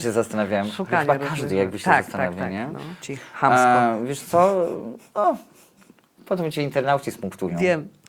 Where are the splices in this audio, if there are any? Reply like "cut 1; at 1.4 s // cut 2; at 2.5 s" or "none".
cut 1; at 3.0 s